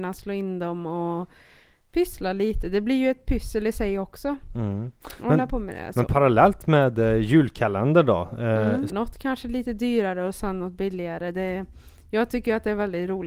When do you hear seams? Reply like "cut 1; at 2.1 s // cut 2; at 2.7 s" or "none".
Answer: cut 1; at 8.9 s